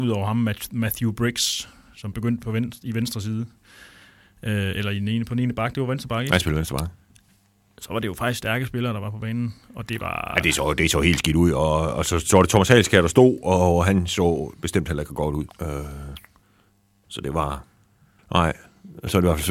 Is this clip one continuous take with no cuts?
no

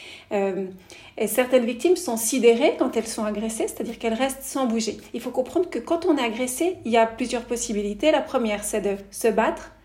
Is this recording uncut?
yes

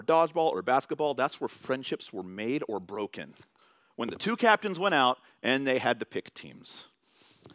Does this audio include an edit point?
no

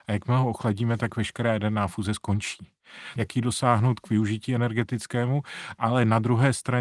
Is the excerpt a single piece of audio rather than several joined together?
no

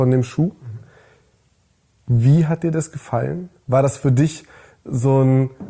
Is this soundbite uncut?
yes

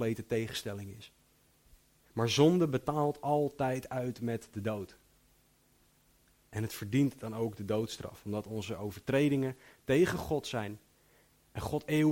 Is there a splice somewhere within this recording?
no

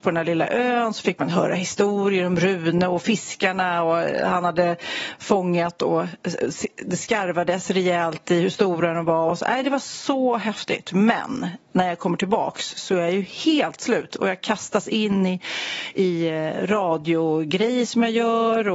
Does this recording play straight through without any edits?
yes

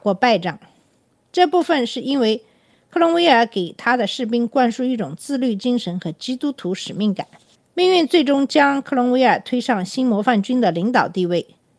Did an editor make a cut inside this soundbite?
no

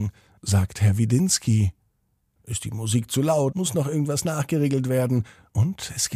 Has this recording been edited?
yes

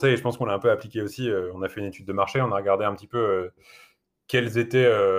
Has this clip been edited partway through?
no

